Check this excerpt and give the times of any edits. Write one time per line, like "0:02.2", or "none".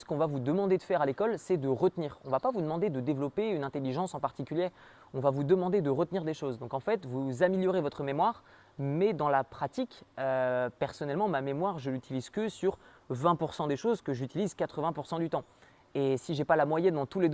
none